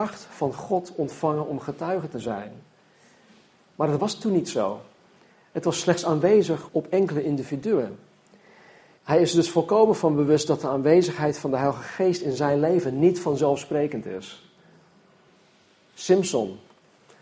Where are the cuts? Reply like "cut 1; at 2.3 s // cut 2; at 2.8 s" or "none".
cut 1; at 6.7 s // cut 2; at 9.0 s